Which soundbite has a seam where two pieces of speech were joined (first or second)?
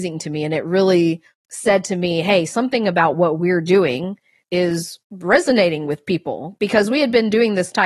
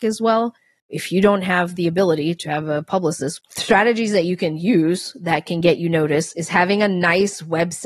second